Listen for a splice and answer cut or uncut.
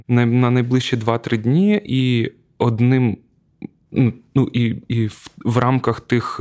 uncut